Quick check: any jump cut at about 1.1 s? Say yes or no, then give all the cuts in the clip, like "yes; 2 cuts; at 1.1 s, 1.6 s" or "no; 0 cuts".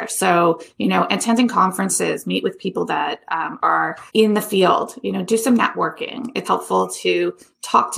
no; 2 cuts; at 4.1 s, 6.4 s